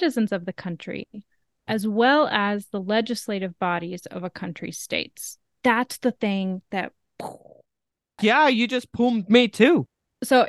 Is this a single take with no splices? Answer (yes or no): yes